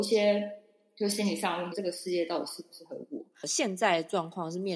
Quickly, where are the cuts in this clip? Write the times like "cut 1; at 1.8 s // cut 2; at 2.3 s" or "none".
cut 1; at 1.7 s // cut 2; at 3.3 s